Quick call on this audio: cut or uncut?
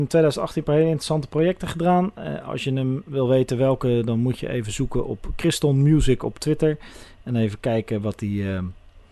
uncut